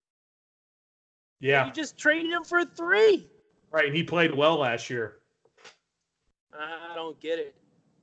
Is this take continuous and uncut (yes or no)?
yes